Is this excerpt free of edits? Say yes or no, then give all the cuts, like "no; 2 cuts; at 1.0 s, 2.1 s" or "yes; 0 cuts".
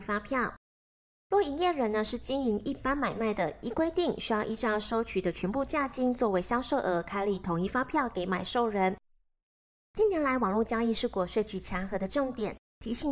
yes; 0 cuts